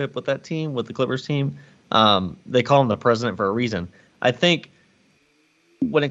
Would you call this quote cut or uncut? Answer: uncut